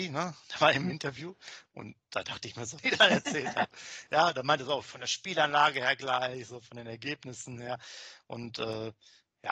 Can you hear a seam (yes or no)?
yes